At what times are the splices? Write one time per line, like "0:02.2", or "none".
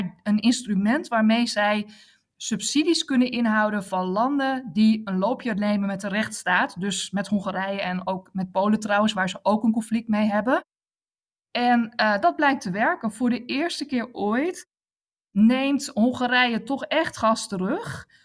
none